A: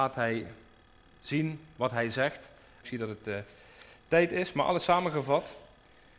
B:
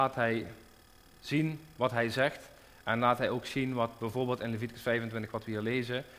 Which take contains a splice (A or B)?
A